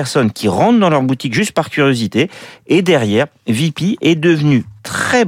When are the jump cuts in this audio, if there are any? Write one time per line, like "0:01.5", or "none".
none